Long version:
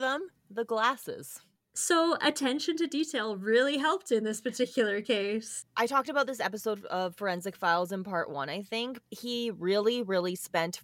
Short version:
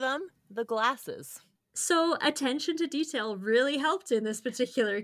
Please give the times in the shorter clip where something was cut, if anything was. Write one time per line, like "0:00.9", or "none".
none